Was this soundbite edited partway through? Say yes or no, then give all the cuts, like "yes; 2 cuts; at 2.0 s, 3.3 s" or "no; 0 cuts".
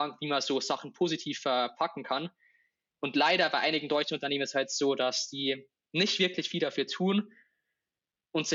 no; 0 cuts